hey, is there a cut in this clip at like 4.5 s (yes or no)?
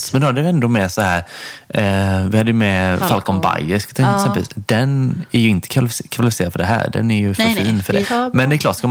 no